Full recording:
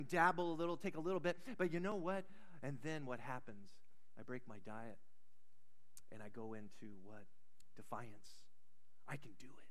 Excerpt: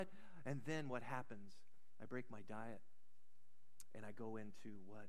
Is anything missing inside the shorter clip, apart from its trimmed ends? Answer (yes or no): no